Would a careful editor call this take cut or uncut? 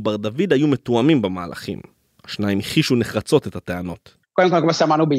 cut